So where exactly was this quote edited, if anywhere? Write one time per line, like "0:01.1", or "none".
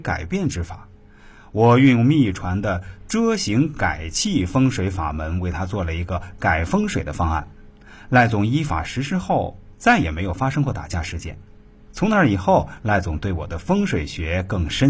none